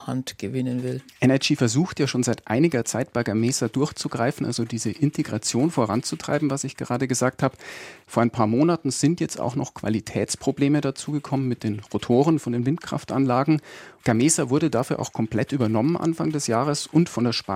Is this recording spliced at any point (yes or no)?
yes